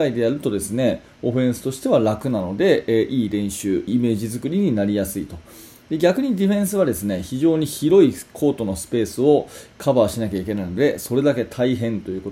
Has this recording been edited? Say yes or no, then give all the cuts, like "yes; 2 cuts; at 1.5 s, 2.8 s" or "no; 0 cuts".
yes; 1 cut; at 3.9 s